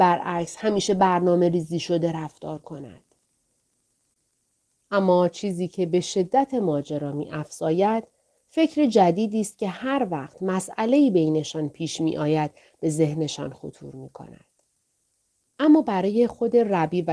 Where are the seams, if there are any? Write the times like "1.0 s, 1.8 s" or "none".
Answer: 15.4 s